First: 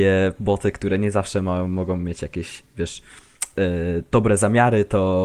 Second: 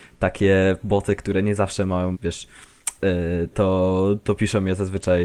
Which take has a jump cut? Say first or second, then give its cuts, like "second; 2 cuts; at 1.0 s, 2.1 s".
second; 2 cuts; at 2.1 s, 3.5 s